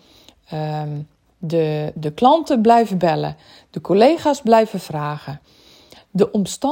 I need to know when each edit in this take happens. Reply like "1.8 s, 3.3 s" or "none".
1.9 s